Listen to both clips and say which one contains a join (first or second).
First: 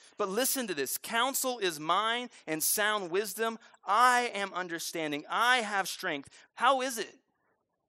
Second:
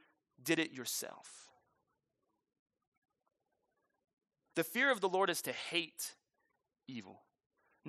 first